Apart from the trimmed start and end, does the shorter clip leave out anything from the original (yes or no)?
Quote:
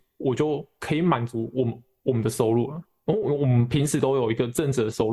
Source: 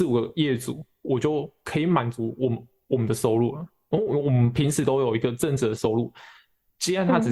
no